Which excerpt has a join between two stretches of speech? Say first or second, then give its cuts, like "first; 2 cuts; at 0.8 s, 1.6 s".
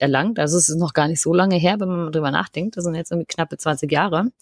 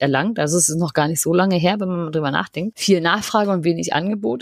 second; 1 cut; at 2.7 s